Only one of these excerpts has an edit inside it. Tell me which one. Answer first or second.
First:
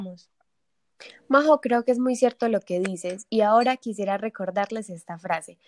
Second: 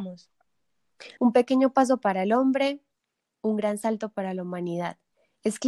second